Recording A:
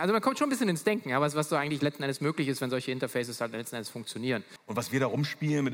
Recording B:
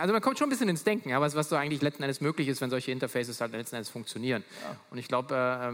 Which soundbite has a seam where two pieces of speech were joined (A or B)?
A